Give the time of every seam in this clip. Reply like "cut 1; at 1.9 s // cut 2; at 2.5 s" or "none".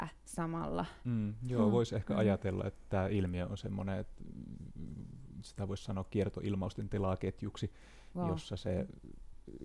none